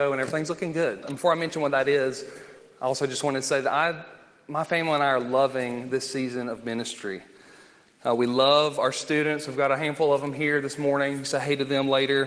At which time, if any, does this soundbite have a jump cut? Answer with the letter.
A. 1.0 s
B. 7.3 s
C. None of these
A